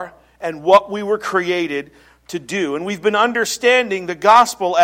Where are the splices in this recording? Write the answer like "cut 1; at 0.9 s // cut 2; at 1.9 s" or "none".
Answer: none